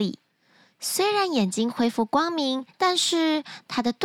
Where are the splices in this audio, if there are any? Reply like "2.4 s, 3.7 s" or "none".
2.7 s